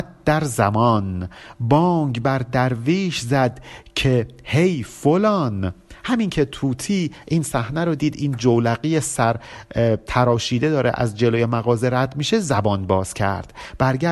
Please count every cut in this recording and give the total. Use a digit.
1